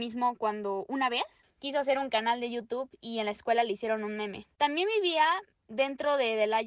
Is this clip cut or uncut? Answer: cut